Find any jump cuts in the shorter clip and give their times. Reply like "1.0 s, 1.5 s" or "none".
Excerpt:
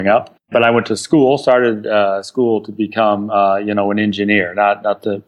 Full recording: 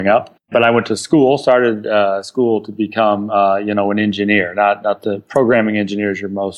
none